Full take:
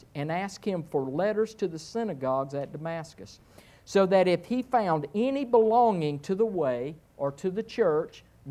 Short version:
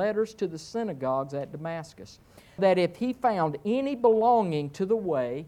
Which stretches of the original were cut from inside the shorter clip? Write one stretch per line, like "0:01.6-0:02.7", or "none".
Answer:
0:03.8-0:04.1